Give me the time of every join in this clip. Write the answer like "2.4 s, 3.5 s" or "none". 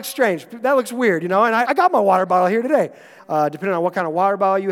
1.6 s, 3.2 s